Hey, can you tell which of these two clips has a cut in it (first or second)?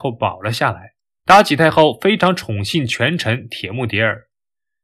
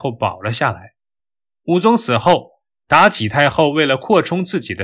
first